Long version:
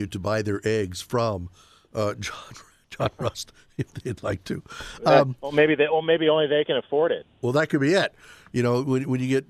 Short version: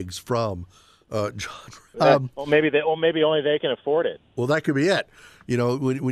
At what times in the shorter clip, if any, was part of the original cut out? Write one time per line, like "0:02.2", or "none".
0:01.9